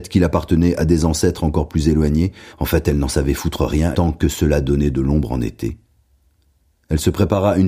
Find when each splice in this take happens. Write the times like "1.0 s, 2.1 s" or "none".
2.5 s, 3.9 s